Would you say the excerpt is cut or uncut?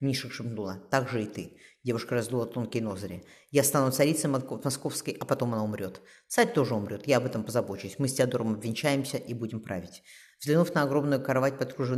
uncut